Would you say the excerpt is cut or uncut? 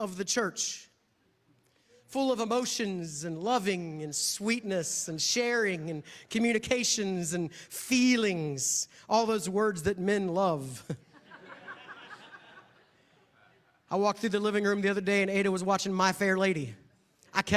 uncut